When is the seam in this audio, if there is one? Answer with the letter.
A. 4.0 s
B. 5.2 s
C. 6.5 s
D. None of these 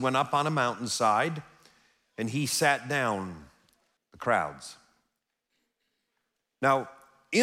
A